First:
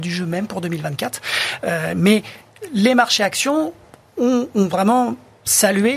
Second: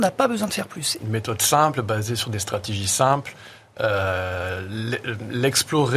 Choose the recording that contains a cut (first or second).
second